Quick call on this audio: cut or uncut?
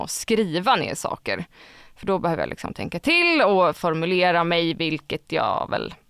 uncut